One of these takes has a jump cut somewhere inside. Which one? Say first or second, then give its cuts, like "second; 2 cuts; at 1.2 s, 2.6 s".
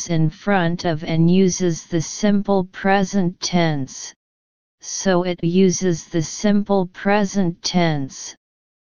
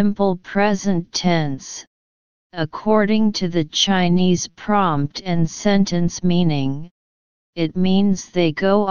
first; 1 cut; at 5.4 s